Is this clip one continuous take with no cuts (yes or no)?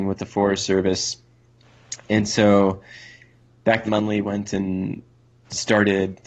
no